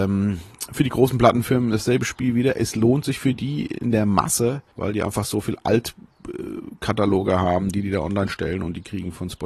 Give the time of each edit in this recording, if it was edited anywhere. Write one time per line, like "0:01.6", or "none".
0:04.7